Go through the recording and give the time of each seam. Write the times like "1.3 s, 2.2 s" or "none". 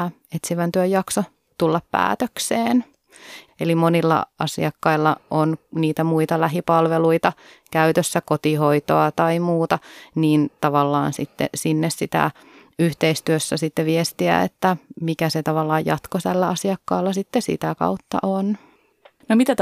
3.5 s